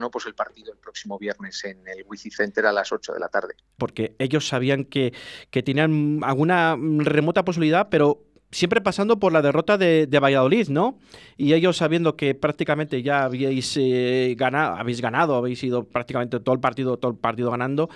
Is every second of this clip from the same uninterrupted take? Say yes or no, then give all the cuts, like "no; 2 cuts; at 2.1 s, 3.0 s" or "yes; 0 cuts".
no; 1 cut; at 3.8 s